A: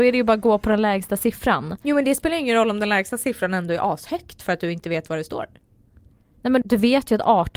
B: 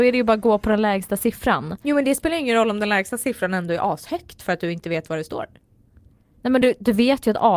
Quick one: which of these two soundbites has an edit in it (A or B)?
A